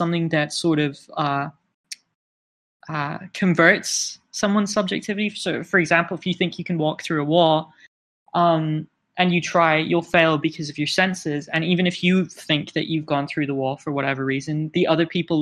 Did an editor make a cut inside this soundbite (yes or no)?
no